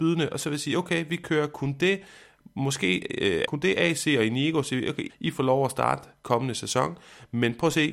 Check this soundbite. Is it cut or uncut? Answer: cut